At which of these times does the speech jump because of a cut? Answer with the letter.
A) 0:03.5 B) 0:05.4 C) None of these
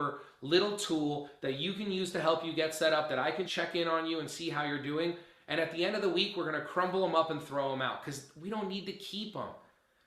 A